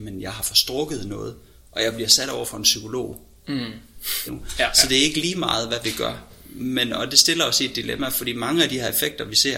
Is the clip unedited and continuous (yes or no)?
no